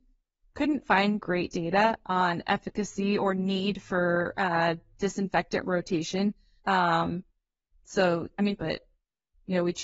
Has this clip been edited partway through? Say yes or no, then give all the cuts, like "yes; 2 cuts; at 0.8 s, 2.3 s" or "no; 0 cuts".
yes; 2 cuts; at 6.6 s, 8.6 s